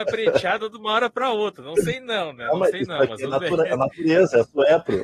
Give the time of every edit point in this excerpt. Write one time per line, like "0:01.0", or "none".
none